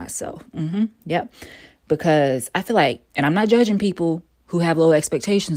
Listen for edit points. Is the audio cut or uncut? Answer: cut